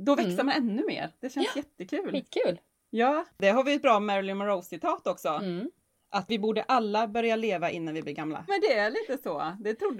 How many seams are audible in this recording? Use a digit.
2